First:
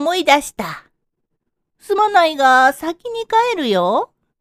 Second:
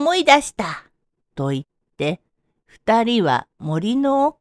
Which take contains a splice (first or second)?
second